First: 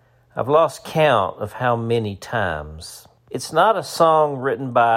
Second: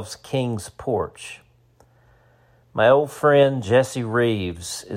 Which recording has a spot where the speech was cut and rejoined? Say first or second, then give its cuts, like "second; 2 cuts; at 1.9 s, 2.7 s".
first; 1 cut; at 3.2 s